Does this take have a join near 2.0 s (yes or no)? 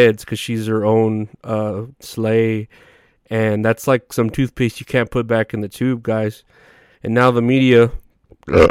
yes